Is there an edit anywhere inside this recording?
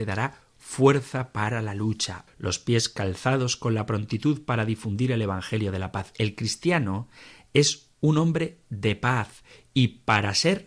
yes; 1 cut; at 2.3 s

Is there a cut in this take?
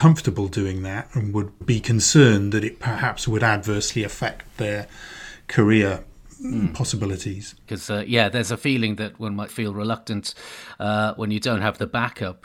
yes; 1 cut; at 9.5 s

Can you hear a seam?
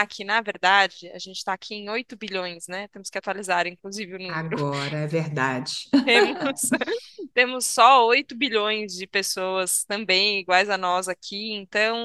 no; 0 cuts

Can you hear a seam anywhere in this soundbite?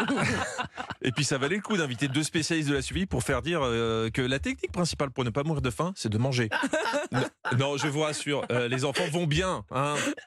yes; 1 cut; at 6.5 s

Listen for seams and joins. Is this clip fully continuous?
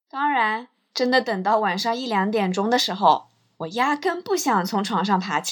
yes; 0 cuts

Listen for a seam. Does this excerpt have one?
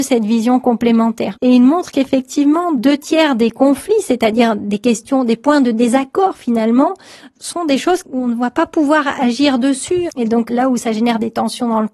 yes; 2 cuts; at 1.3 s, 10.1 s

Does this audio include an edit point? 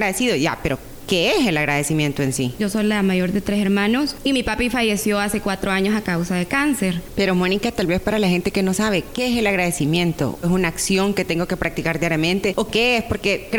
yes; 3 cuts; at 2.6 s, 7.1 s, 10.4 s

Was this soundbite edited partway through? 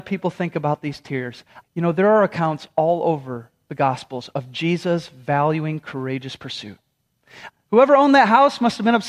yes; 2 cuts; at 1.6 s, 7.5 s

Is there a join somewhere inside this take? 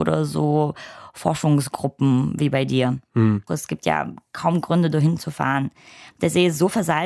yes; 1 cut; at 3.5 s

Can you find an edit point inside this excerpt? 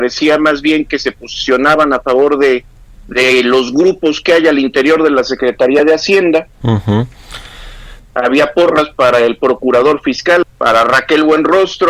yes; 3 cuts; at 6.6 s, 8.0 s, 10.4 s

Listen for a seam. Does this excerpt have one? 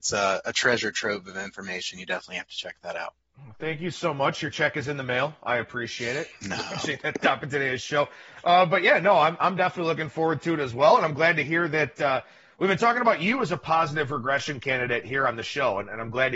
no; 0 cuts

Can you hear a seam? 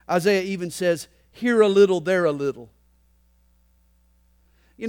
no; 0 cuts

